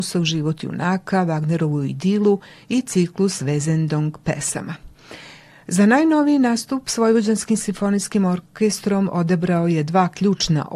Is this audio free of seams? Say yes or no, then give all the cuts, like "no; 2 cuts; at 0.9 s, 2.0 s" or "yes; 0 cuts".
yes; 0 cuts